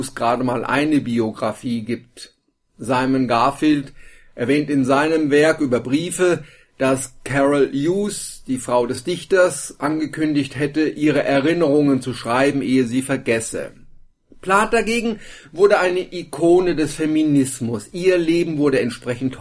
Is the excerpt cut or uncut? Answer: uncut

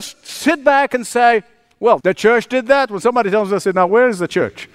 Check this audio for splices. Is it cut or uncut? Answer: cut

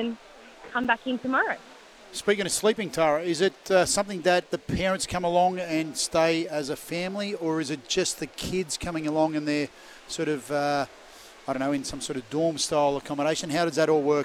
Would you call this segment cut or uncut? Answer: uncut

